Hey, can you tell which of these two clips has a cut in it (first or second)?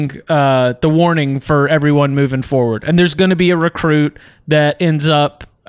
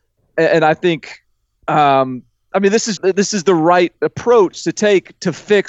second